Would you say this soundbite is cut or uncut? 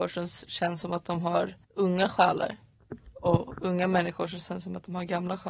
cut